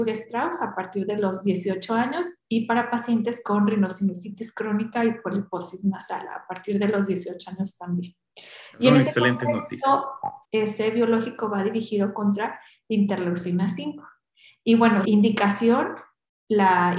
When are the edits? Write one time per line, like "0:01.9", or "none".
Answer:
0:10.5
0:15.1